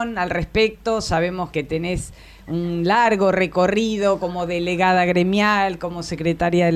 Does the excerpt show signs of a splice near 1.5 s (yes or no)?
yes